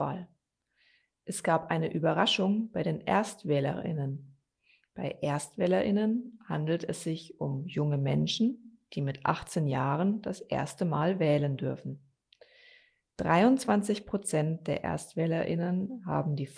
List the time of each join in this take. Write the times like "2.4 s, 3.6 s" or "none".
none